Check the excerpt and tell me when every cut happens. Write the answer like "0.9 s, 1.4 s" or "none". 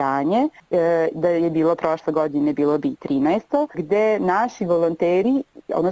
none